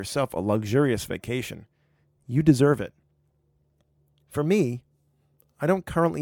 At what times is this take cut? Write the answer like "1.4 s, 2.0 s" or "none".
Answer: none